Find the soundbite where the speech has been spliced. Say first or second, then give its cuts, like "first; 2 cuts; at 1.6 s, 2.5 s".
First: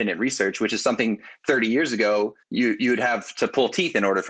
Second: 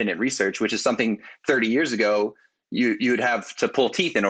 first; 1 cut; at 2.4 s